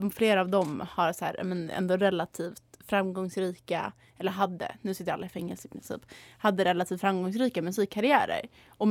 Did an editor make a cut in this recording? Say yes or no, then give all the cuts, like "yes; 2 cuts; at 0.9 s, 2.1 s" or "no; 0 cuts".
no; 0 cuts